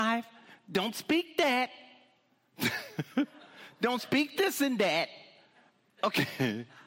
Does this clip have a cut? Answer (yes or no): no